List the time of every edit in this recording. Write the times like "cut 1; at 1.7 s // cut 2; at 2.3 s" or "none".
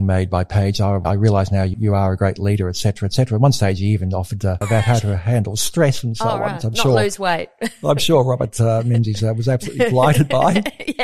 cut 1; at 1.0 s // cut 2; at 4.6 s